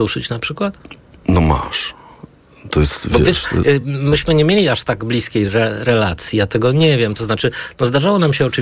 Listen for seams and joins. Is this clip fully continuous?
yes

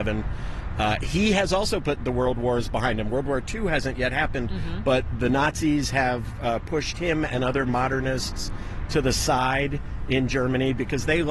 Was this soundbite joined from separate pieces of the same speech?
no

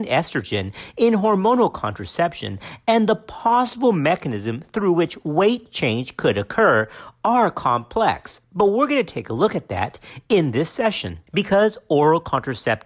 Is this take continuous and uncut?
no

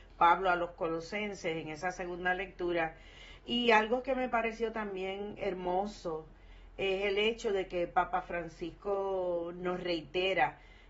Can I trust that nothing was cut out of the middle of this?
yes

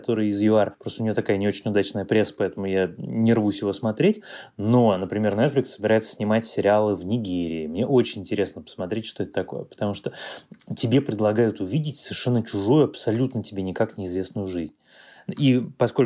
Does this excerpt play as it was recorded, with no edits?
yes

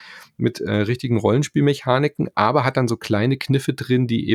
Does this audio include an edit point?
no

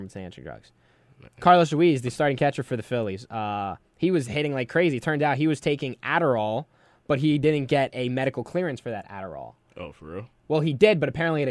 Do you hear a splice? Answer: no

